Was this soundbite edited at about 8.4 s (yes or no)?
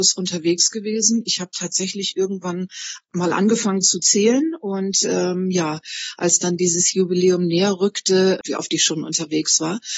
yes